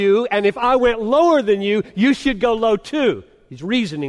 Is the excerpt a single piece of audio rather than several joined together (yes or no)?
yes